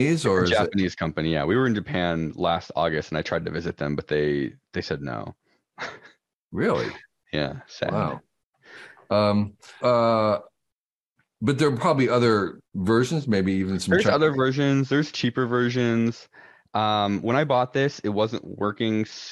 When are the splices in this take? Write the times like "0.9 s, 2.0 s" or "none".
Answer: 9.8 s, 12.7 s